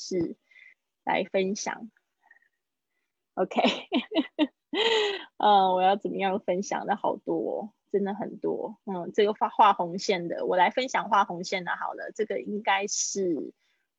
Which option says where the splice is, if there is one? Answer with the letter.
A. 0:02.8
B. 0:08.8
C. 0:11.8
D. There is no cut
D